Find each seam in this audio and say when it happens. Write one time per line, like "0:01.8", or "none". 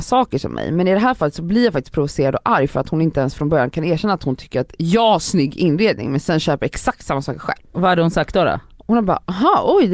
0:07.7